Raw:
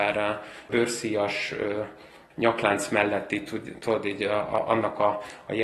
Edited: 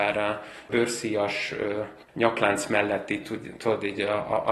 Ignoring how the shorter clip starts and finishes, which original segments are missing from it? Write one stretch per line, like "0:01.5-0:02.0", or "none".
0:02.0-0:02.2

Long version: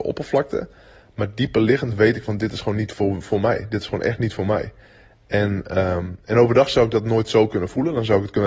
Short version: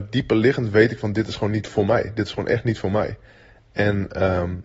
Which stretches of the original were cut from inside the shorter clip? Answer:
0:02.9-0:03.2

